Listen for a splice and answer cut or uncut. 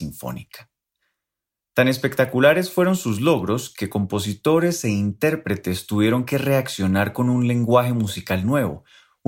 uncut